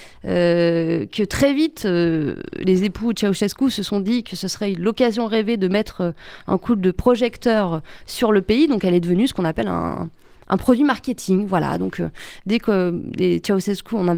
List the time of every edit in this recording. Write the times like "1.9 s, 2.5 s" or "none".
none